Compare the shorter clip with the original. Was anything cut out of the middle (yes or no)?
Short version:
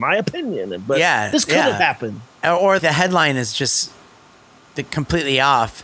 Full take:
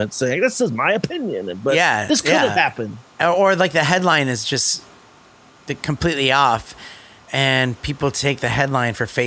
yes